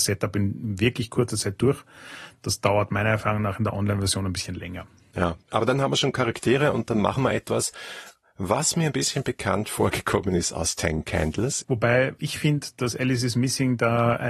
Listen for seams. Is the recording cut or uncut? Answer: cut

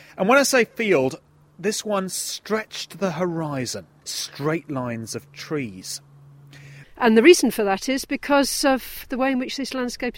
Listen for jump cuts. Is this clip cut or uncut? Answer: cut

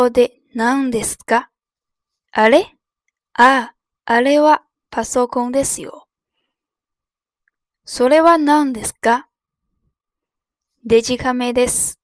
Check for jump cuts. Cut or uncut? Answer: uncut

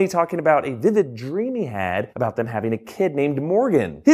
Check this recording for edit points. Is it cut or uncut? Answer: uncut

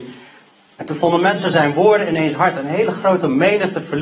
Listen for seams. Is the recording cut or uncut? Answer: uncut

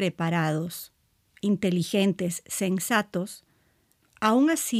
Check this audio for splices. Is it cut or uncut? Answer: uncut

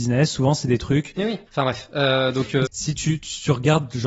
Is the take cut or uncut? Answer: cut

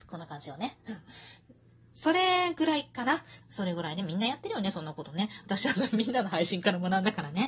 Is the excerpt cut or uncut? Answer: cut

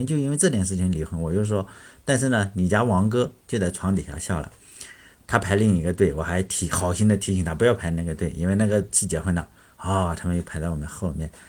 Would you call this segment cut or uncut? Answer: cut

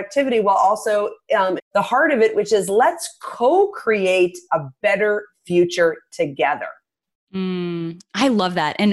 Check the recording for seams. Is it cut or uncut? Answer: cut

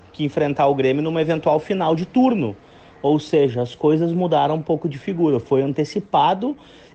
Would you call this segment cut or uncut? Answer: uncut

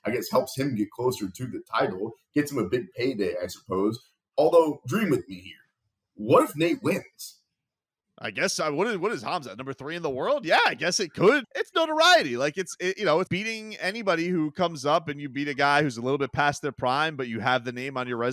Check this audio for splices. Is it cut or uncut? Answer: cut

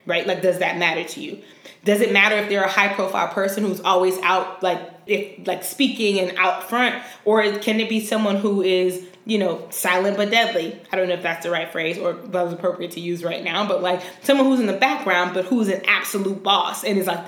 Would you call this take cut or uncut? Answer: cut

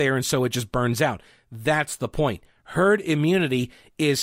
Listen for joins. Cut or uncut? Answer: uncut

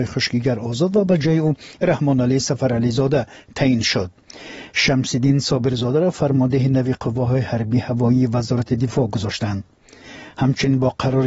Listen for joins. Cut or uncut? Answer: uncut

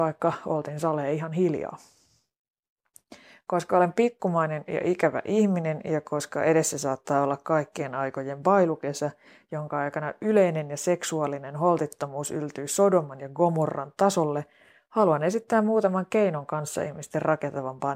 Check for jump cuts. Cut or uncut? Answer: uncut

